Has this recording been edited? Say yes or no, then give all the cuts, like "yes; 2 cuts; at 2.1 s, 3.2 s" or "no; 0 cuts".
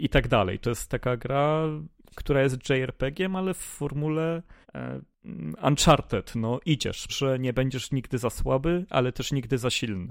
yes; 2 cuts; at 4.6 s, 7.1 s